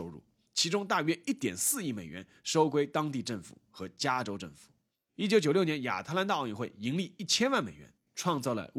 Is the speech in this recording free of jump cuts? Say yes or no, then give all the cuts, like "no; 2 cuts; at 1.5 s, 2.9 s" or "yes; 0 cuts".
no; 1 cut; at 5.1 s